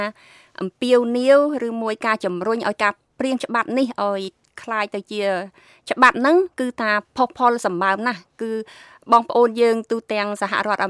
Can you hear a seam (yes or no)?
no